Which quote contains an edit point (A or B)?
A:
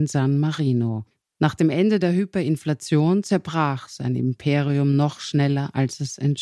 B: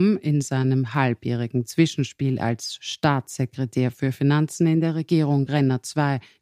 A